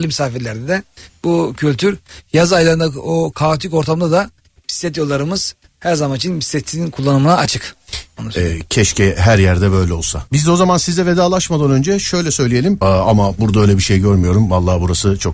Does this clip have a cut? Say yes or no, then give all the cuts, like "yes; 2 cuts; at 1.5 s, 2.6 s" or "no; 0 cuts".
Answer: yes; 2 cuts; at 10.3 s, 12.8 s